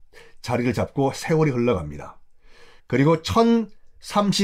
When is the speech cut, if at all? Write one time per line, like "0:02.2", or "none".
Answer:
0:02.8